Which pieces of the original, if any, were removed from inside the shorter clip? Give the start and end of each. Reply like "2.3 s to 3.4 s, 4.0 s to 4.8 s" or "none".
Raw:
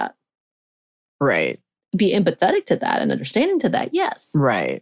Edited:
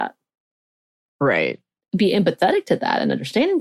none